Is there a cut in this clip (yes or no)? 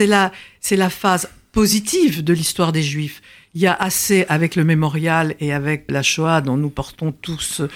yes